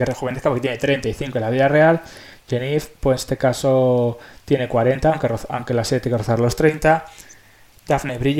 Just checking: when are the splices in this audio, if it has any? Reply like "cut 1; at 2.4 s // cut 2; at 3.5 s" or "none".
none